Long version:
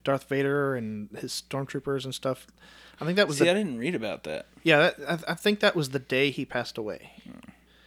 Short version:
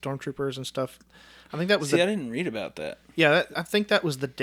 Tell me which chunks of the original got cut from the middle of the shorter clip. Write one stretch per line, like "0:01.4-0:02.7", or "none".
0:05.0-0:05.2